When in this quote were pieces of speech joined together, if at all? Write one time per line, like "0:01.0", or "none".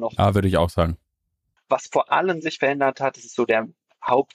0:01.6